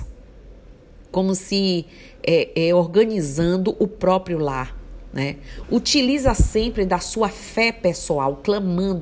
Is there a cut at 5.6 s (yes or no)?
yes